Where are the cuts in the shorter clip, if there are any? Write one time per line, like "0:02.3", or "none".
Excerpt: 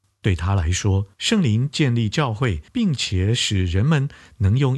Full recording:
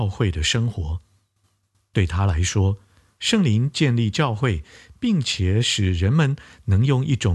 0:01.1
0:02.7